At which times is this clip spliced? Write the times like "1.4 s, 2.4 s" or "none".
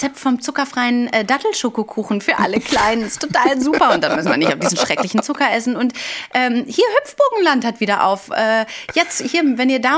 none